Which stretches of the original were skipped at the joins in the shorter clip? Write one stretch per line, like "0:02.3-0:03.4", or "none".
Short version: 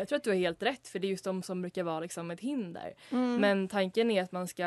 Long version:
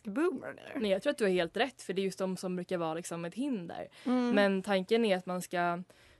none